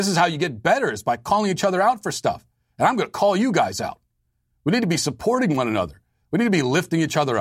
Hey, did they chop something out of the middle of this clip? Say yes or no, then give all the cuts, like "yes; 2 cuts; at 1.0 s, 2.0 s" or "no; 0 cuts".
no; 0 cuts